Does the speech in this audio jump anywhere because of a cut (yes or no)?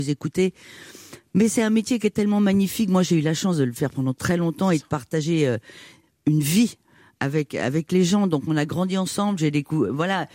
no